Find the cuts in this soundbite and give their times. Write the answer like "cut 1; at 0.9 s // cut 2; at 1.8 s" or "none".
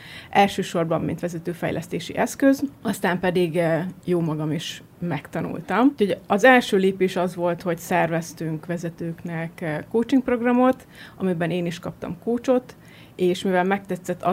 none